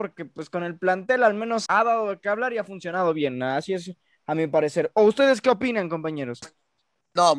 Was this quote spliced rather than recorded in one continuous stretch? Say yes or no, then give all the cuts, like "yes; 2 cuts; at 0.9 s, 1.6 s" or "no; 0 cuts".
yes; 1 cut; at 1.7 s